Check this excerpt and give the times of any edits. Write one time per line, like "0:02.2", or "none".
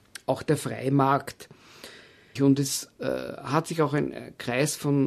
0:02.4